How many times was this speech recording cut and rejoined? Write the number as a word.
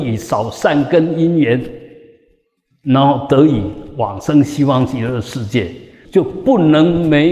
one